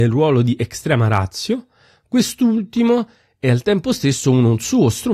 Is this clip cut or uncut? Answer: uncut